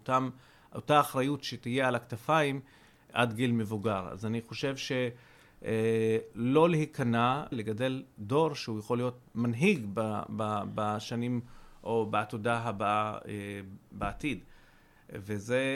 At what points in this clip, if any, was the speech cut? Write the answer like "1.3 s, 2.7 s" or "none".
7.5 s, 9.3 s